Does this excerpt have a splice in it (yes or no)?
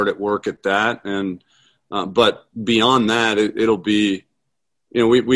no